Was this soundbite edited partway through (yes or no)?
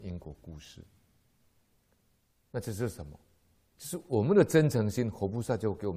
no